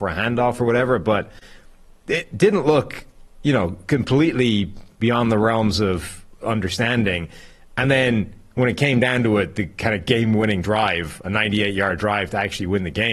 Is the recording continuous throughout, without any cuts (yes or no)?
yes